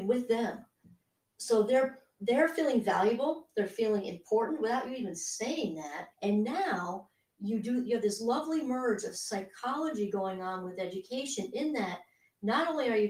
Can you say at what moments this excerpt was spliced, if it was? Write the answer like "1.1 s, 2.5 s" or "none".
6.1 s